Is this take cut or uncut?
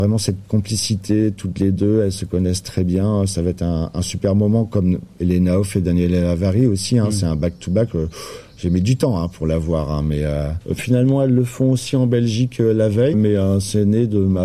cut